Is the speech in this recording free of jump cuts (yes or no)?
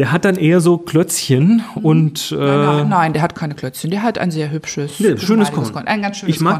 yes